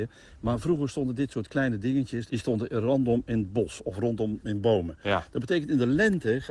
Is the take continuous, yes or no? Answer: no